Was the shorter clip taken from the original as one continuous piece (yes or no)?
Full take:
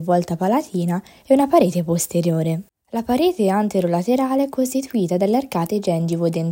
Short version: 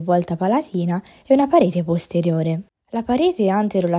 yes